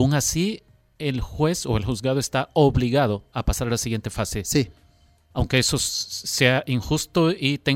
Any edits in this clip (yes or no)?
no